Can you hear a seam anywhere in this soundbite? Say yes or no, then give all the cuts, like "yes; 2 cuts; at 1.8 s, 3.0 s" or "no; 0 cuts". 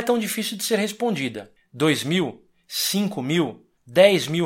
yes; 1 cut; at 1.6 s